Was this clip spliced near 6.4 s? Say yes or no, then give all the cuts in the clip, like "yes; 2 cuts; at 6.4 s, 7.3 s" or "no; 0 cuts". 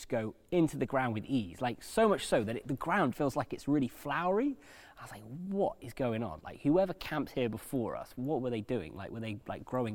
no; 1 cut; at 3.1 s